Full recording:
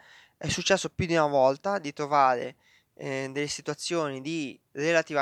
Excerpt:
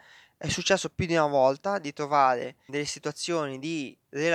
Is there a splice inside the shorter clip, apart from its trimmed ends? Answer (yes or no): yes